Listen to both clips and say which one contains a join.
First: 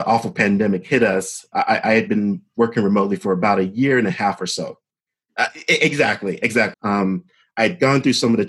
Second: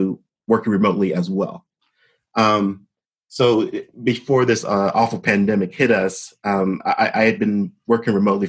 first; 3 cuts; at 1.5 s, 5.3 s, 6.7 s

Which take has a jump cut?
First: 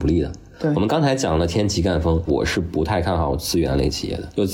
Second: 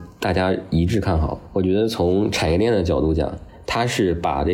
first; 1 cut; at 2.3 s

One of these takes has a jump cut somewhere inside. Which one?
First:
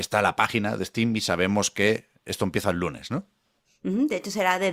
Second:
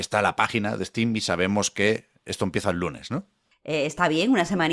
second; 1 cut; at 3.5 s

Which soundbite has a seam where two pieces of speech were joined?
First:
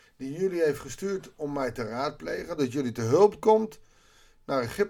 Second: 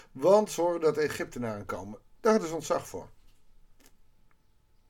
first; 1 cut; at 2.6 s

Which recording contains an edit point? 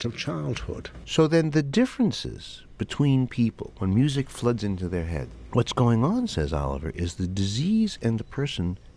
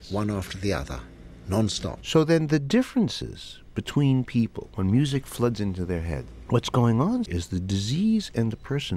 second; 2 cuts; at 2.0 s, 7.3 s

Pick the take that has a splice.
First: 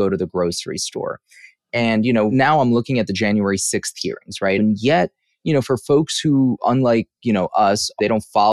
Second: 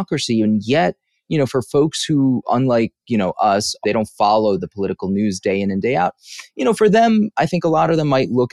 first; 1 cut; at 4.6 s

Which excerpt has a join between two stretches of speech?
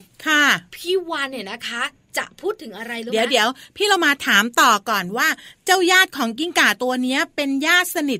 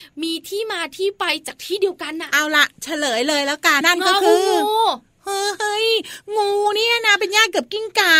second; 1 cut; at 3.8 s

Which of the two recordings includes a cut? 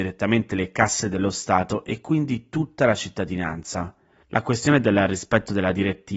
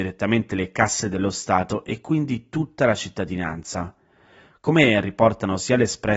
first; 1 cut; at 4.2 s

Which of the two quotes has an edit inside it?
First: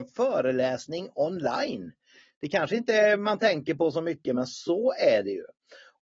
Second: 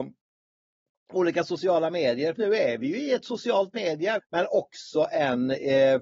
second; 2 cuts; at 2.4 s, 4.2 s

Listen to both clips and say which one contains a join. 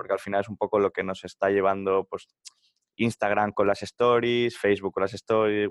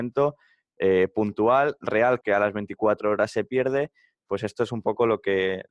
second; 1 cut; at 2.2 s

